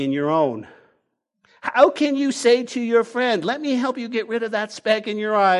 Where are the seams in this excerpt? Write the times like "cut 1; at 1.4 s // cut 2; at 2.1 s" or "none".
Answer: none